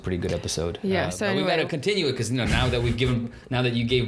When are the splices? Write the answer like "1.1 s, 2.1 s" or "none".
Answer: none